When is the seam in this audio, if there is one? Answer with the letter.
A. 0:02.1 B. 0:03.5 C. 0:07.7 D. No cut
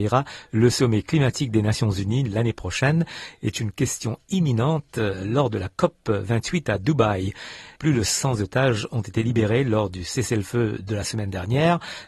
C